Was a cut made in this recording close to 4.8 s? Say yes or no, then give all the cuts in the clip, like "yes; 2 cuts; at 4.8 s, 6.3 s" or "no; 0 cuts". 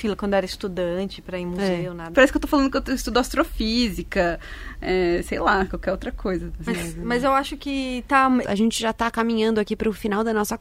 no; 3 cuts; at 2.1 s, 6.7 s, 8.4 s